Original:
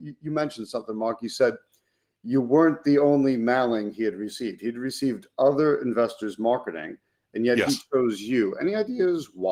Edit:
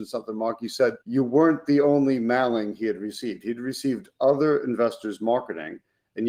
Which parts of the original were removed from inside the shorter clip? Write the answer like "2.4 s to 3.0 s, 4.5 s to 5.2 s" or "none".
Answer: 1.6 s to 2.2 s